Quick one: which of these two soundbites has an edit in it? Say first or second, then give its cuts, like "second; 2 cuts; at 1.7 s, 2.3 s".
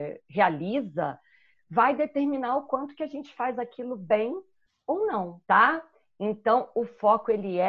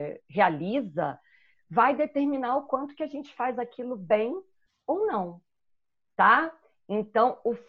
first; 1 cut; at 5.4 s